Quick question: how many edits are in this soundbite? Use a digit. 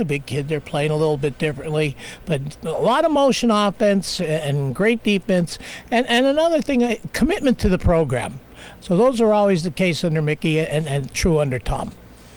2